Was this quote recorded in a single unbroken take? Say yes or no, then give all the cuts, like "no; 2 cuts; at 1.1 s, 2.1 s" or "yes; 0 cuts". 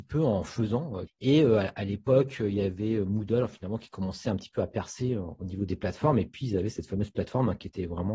no; 1 cut; at 1.1 s